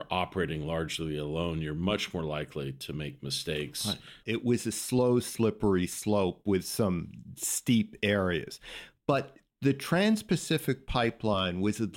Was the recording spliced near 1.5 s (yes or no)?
no